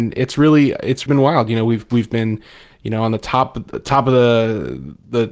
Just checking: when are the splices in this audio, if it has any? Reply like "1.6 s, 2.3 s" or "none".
1.1 s